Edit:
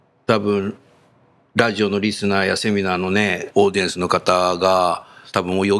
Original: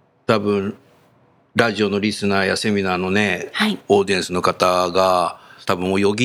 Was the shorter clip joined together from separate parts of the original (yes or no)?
yes